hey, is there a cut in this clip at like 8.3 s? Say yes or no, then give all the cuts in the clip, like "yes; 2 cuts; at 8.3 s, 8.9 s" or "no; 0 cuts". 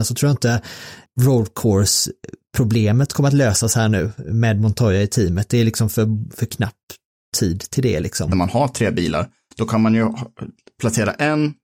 yes; 1 cut; at 8.3 s